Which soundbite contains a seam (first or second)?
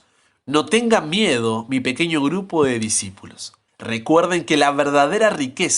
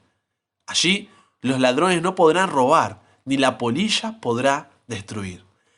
first